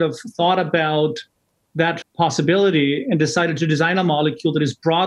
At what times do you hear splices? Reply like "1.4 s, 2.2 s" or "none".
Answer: 2.0 s